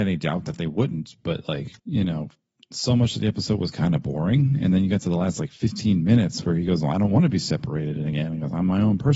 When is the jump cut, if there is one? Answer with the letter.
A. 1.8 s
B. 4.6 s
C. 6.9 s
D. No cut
A